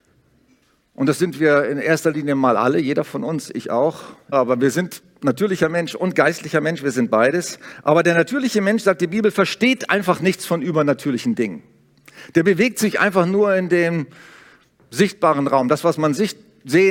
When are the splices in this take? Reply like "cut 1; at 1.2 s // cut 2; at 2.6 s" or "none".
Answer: cut 1; at 4.3 s